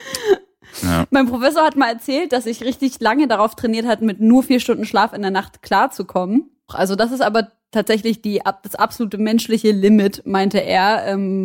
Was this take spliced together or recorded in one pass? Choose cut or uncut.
cut